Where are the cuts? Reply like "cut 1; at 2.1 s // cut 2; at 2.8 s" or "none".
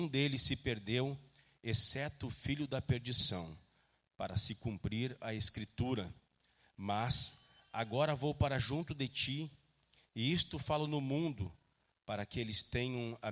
none